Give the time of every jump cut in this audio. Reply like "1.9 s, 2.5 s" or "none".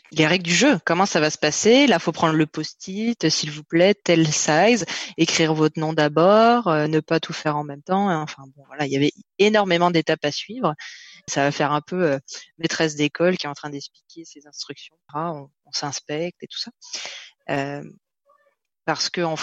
11.3 s, 15.1 s